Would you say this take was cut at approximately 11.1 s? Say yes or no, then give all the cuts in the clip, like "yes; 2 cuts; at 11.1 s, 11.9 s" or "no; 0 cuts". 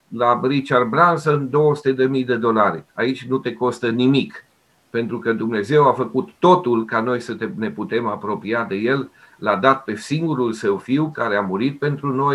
yes; 1 cut; at 11.1 s